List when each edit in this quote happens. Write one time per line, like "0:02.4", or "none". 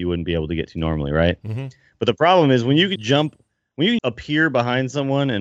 0:03.0
0:04.0